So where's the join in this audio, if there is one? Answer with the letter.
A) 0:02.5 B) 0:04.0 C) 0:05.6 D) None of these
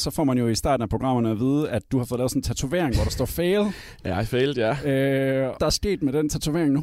C